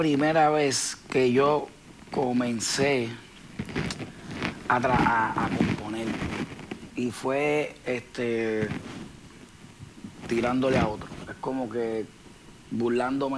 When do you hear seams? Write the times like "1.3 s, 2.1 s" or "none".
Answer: none